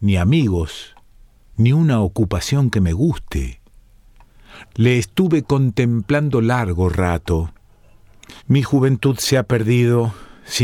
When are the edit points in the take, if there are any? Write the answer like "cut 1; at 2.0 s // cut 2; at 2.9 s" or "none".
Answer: cut 1; at 4.6 s // cut 2; at 8.4 s